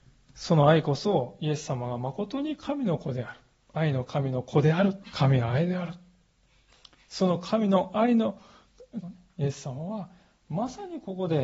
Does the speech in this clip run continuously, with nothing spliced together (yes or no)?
no